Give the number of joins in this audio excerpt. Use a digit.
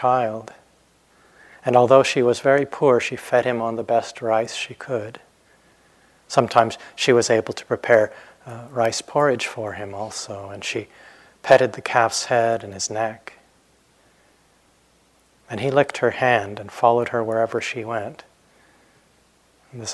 0